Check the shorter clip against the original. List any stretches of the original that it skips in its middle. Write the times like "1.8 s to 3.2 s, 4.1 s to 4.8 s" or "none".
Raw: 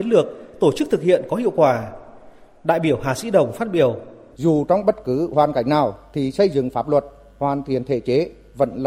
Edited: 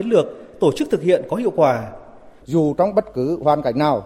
2.4 s to 4.3 s